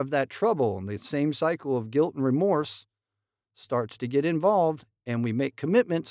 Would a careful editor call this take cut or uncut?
uncut